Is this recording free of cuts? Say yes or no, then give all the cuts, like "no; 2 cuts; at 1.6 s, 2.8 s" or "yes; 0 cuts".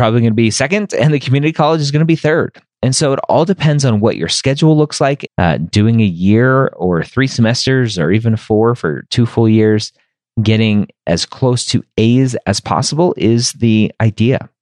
no; 1 cut; at 5.3 s